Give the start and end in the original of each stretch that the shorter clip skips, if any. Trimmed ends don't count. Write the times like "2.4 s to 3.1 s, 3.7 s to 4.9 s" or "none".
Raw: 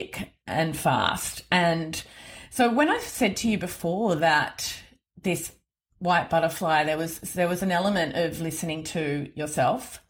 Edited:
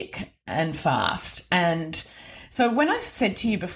none